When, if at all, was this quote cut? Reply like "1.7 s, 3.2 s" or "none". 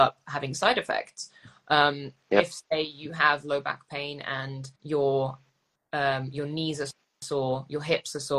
4.8 s